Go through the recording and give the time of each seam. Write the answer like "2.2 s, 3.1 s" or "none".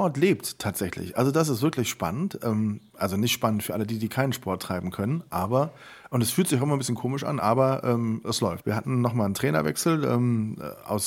8.6 s